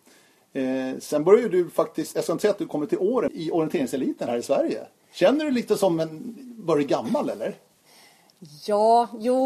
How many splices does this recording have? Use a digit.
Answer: 1